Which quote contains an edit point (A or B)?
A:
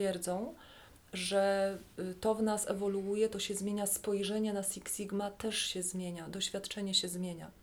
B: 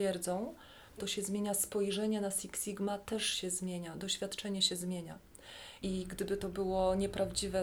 B